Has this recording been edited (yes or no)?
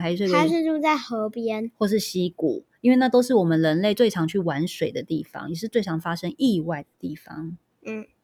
no